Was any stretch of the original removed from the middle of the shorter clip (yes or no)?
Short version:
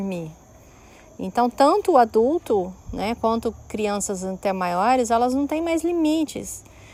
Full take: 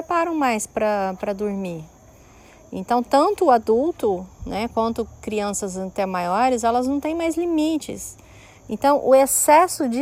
no